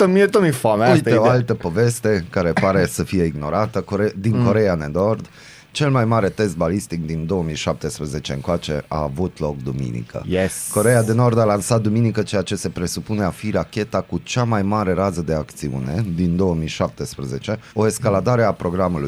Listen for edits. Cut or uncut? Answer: cut